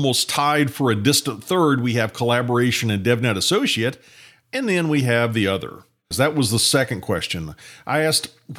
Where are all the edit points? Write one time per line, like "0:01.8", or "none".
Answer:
0:06.1